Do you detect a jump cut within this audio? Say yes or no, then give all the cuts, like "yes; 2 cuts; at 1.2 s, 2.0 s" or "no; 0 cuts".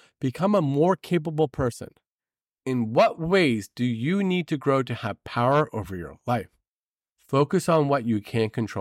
no; 0 cuts